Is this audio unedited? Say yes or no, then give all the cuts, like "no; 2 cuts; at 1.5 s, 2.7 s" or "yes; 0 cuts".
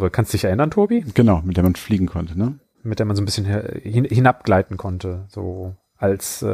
yes; 0 cuts